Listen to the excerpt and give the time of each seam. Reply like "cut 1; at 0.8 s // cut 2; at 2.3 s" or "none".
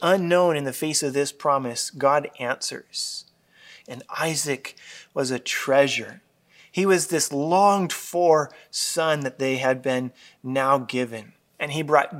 cut 1; at 3.8 s

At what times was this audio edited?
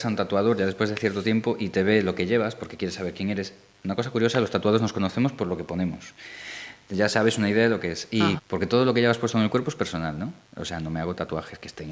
cut 1; at 8.4 s // cut 2; at 10.4 s

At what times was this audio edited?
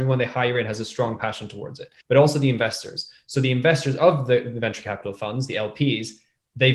cut 1; at 2.0 s

